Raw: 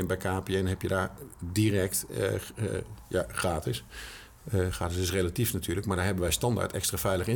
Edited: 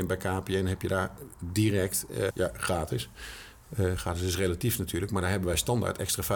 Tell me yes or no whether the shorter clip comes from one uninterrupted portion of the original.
no